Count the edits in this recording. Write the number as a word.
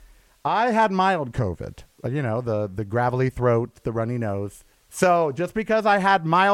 one